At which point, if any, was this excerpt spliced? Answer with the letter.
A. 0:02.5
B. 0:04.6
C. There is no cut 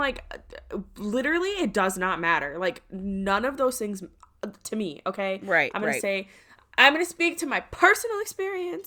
B